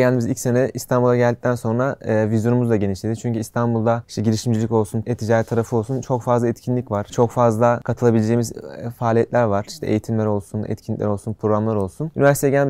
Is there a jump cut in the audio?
yes; 1 cut; at 5.0 s

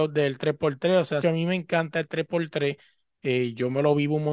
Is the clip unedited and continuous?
no; 1 cut; at 1.2 s

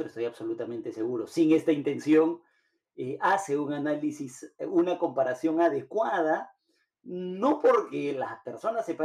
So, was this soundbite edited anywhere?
no; 0 cuts

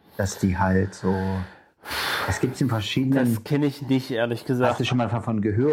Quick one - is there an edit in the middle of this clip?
no; 0 cuts

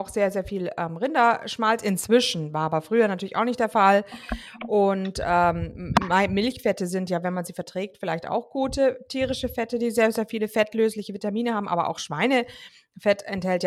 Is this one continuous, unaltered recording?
yes; 0 cuts

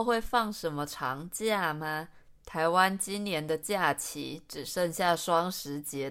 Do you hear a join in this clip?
yes; 1 cut; at 2.4 s

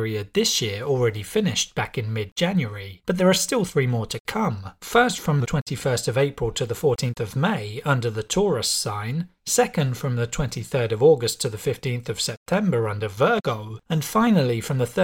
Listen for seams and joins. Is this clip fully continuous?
yes; 0 cuts

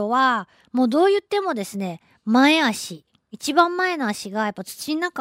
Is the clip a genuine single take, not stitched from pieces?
yes; 0 cuts

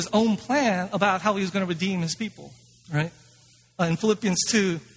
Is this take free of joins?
no; 1 cut; at 2.8 s

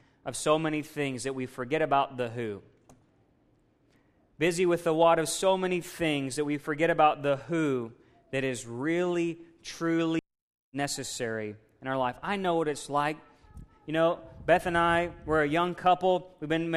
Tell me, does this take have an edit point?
no; 0 cuts

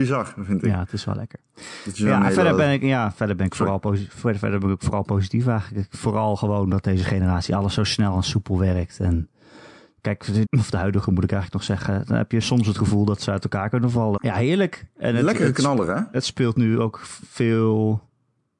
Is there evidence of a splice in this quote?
yes; 2 cuts; at 10.4 s, 14.2 s

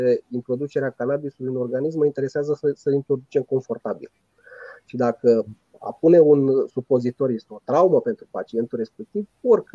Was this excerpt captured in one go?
yes; 0 cuts

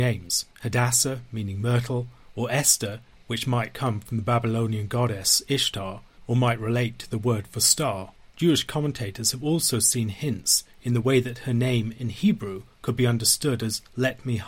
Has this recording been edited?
no; 0 cuts

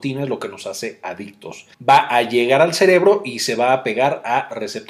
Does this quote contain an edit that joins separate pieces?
yes; 1 cut; at 1.7 s

